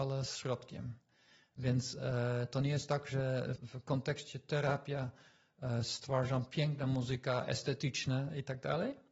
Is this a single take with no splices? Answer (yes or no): no